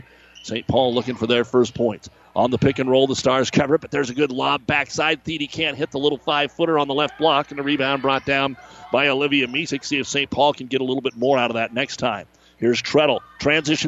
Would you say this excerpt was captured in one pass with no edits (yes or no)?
no